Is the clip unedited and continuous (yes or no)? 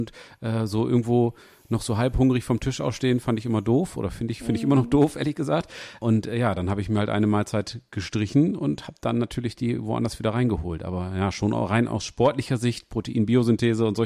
yes